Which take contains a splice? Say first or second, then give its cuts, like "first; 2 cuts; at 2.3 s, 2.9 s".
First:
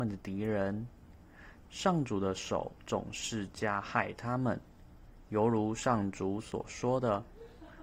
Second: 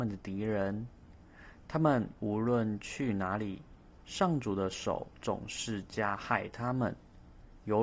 first; 1 cut; at 1.7 s